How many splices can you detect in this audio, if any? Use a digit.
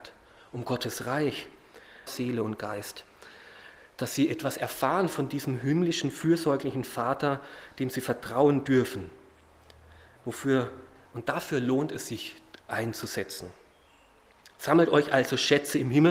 1